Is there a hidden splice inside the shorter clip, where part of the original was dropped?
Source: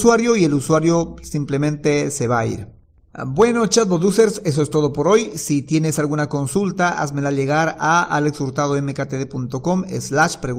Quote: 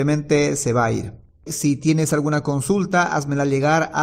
yes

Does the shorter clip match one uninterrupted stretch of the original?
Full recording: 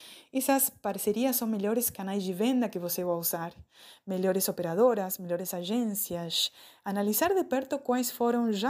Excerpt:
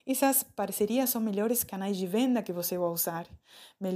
yes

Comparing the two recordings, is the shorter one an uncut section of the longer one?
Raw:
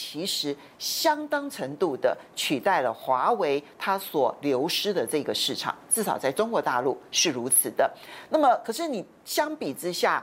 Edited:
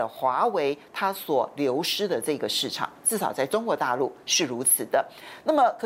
yes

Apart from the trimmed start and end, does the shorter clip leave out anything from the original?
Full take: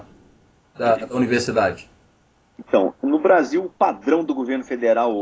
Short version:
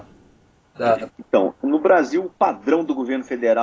yes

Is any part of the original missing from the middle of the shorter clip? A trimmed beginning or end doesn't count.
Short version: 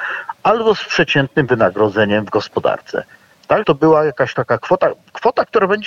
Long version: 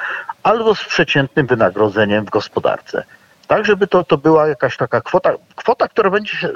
yes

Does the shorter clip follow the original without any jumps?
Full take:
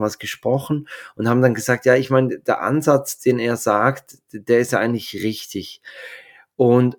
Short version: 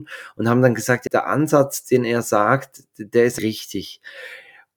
no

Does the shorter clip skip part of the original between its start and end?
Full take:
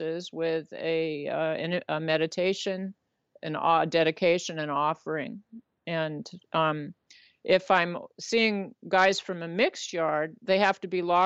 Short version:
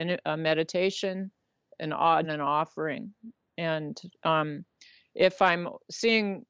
yes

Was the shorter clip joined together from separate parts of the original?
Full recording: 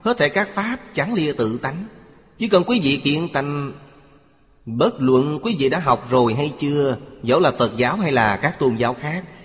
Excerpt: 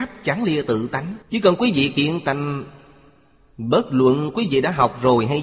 yes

